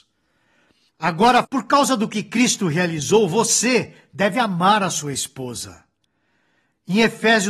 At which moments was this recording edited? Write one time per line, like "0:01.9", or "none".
0:01.4